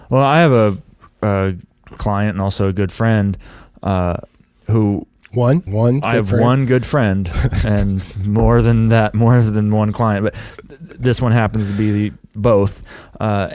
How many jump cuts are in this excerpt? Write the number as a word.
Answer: one